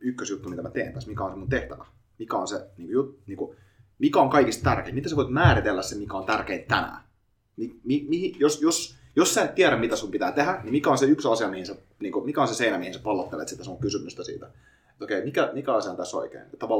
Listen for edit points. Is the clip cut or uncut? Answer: uncut